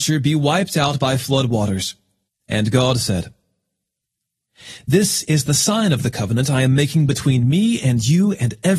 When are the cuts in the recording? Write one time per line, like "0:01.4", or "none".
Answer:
0:02.3